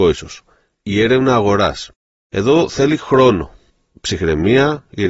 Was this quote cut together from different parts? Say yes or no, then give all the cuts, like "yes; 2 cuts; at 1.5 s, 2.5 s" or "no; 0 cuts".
no; 0 cuts